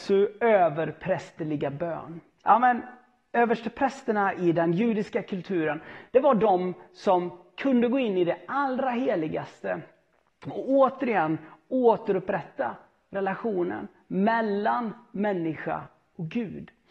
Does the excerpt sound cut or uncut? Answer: cut